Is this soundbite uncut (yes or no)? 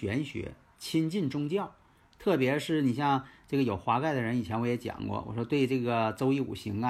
yes